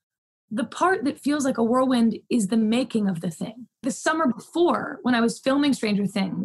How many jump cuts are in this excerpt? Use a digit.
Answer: 1